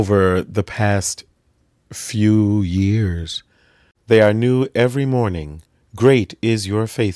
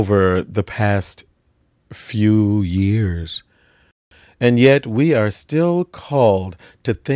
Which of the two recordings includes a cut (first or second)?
first